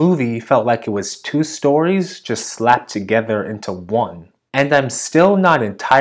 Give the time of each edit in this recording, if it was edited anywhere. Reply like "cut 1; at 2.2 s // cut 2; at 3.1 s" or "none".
none